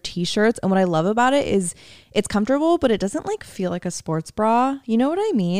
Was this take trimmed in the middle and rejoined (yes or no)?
no